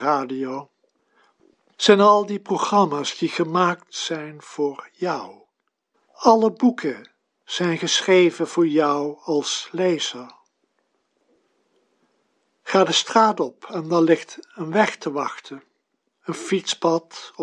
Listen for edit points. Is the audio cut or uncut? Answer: cut